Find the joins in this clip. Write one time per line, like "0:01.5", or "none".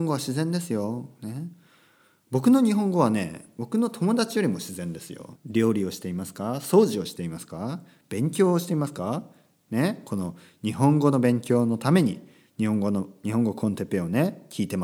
0:05.3

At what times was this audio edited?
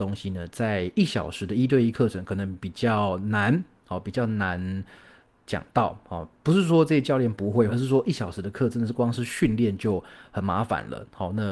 0:07.7

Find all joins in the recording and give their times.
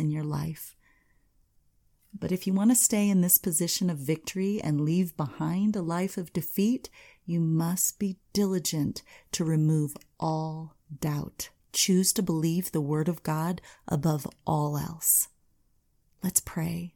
0:11.6

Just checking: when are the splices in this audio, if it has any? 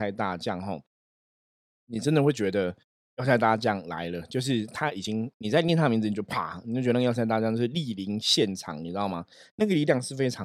none

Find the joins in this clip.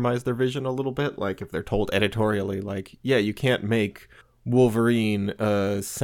none

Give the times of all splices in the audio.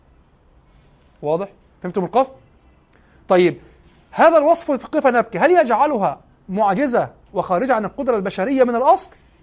0:01.8

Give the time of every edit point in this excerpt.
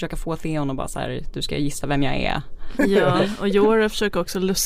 0:02.8

